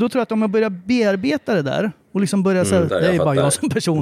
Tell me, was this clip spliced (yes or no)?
yes